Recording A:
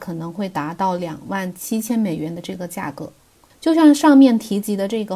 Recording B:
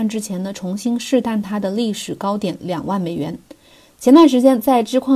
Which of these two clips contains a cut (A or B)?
A